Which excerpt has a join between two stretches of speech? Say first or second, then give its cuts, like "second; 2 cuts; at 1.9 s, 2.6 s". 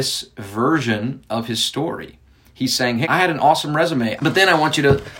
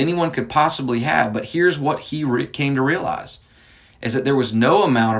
first; 2 cuts; at 3.0 s, 4.2 s